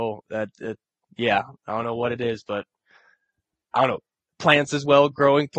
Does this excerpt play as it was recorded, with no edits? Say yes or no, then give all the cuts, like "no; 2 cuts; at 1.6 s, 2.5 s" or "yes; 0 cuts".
yes; 0 cuts